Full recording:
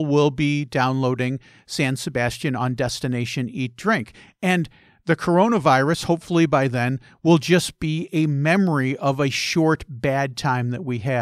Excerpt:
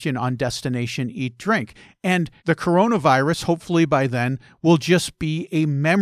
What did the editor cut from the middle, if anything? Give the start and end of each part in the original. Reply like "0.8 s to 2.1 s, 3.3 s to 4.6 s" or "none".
4.8 s to 5.0 s